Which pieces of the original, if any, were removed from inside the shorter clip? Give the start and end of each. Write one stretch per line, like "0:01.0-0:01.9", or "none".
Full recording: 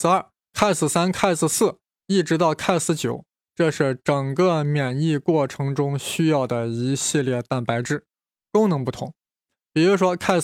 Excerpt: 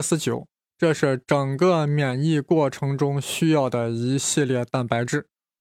none